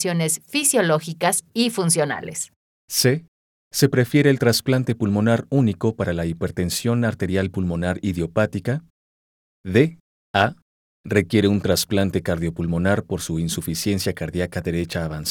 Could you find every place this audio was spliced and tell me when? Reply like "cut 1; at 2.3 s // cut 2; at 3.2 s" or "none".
cut 1; at 2.7 s // cut 2; at 10.2 s